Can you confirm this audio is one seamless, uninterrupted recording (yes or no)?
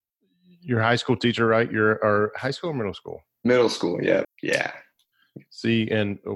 no